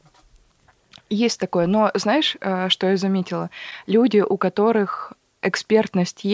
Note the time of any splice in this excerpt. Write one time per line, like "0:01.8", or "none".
none